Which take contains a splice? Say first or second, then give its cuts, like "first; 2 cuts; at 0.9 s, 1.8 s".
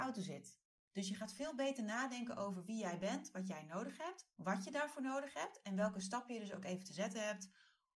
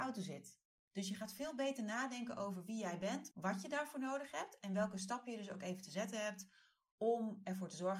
second; 1 cut; at 3.3 s